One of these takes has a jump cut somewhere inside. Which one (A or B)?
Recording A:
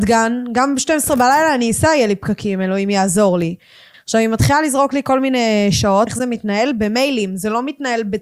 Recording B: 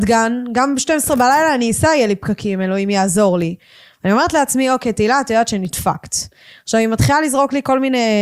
A